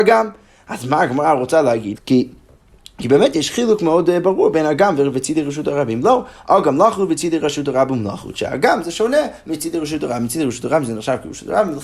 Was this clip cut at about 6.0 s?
no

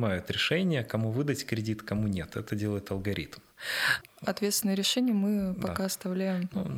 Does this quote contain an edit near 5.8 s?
no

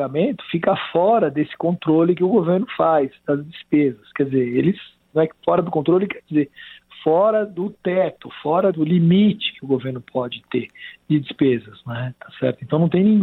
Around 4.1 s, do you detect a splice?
no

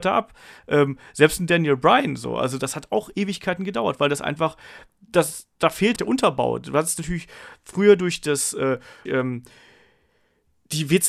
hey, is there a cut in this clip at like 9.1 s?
yes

